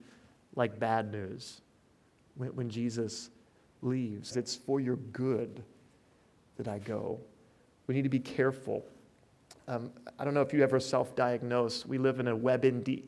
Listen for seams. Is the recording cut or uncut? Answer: cut